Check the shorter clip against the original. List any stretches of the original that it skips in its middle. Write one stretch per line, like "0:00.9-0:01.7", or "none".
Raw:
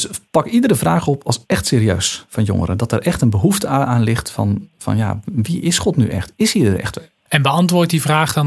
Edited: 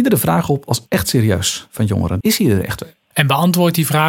0:02.8-0:06.4